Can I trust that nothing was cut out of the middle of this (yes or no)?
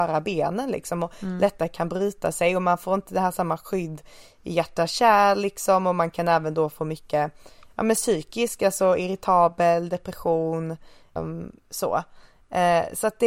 no